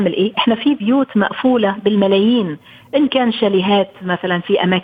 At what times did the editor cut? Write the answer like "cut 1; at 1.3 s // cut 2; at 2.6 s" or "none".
none

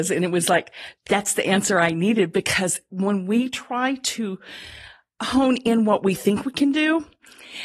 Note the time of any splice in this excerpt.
cut 1; at 1.0 s

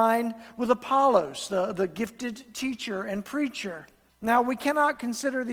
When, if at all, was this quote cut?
cut 1; at 4.1 s

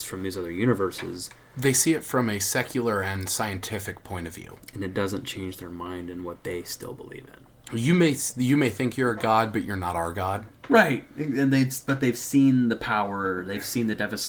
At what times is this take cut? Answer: none

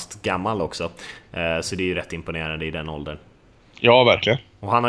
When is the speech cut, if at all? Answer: none

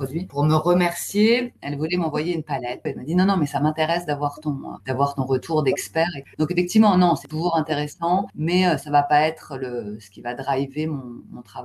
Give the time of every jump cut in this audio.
cut 1; at 2.9 s // cut 2; at 6.3 s

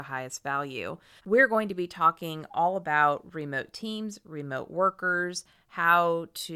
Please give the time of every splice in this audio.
cut 1; at 1.2 s

